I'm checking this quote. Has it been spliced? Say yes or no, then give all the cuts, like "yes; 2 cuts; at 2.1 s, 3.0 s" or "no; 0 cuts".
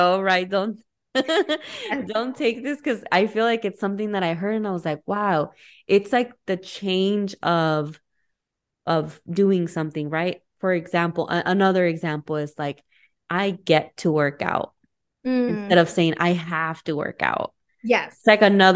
no; 0 cuts